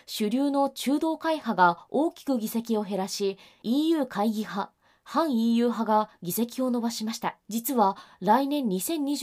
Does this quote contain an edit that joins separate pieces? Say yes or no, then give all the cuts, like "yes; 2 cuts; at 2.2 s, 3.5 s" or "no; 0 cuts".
yes; 1 cut; at 7.4 s